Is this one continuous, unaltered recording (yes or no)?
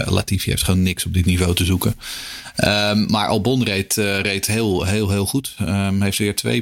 yes